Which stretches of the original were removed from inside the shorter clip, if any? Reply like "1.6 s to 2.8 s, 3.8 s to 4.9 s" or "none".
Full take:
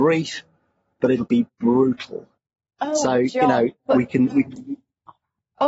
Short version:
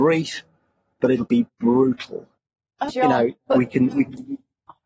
2.9 s to 3.3 s